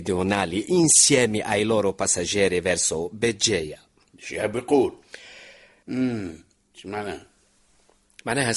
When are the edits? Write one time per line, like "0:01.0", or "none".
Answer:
0:05.8